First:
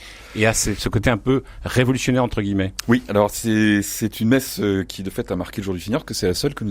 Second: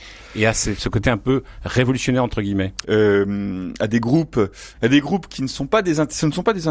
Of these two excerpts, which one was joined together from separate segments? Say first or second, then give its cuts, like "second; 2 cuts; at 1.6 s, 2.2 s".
second; 2 cuts; at 2.8 s, 4.7 s